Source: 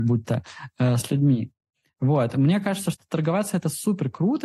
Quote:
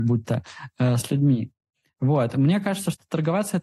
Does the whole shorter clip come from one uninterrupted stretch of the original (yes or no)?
yes